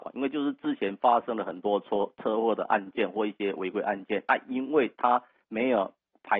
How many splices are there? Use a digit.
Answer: 0